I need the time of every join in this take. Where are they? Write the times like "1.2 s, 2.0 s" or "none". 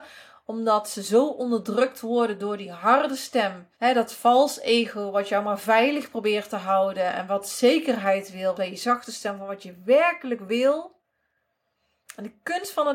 3.7 s, 8.5 s